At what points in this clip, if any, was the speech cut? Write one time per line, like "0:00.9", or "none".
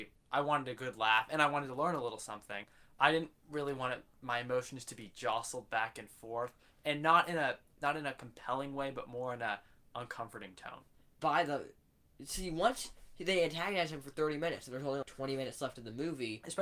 0:11.2
0:15.0